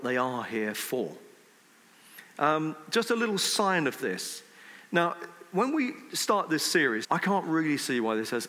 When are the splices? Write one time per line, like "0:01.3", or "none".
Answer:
0:04.9
0:07.0